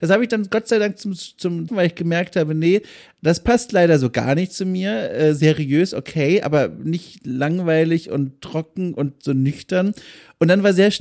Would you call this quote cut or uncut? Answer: cut